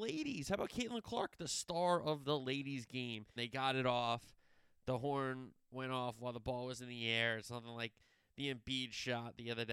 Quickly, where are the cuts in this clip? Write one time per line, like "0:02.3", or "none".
0:03.4